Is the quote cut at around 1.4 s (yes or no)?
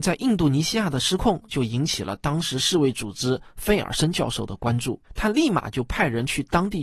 no